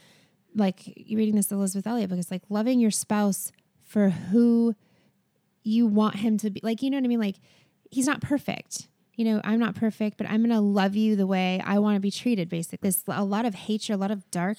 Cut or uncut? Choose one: cut